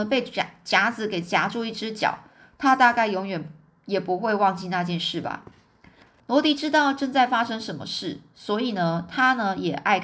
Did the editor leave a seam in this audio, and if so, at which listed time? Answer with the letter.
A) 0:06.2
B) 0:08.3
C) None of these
A